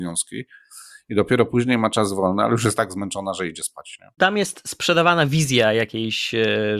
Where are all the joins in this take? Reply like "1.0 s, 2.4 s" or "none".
4.2 s